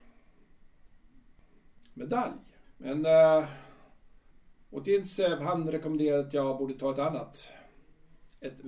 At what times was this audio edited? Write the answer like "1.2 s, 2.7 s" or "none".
2.6 s